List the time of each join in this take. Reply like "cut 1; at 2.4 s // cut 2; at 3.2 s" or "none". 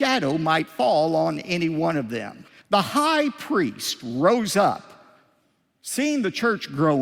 cut 1; at 2.6 s

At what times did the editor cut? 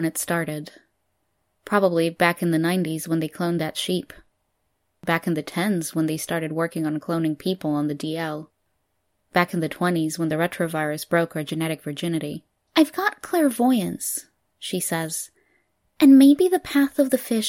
cut 1; at 12.7 s

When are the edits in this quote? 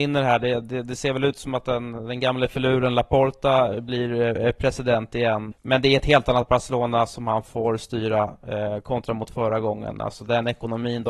cut 1; at 5.5 s

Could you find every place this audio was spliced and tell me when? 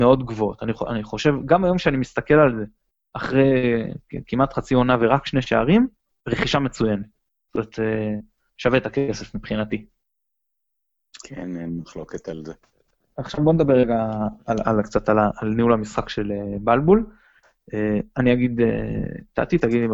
none

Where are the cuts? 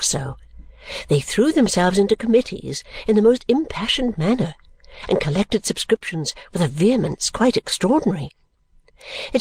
none

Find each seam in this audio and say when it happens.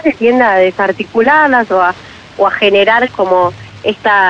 cut 1; at 3.1 s

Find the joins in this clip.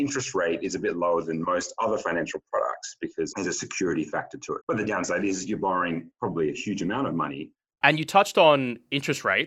cut 1; at 4.6 s // cut 2; at 7.8 s

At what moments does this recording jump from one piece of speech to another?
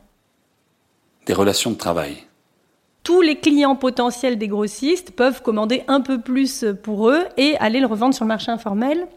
cut 1; at 3.0 s

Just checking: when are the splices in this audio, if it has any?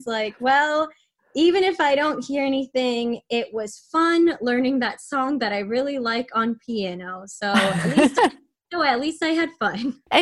none

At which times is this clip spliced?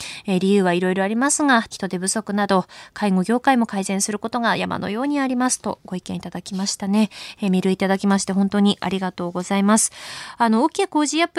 cut 1; at 1.7 s

